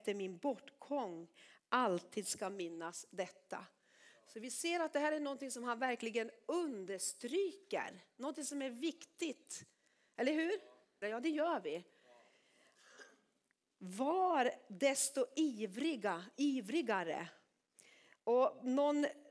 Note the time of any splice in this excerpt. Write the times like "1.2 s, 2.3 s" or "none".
11.0 s